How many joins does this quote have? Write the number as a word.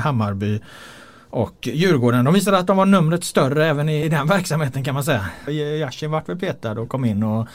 two